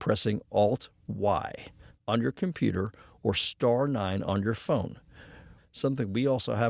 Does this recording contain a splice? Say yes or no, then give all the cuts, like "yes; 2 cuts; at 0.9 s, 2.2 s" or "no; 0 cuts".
yes; 1 cut; at 5.6 s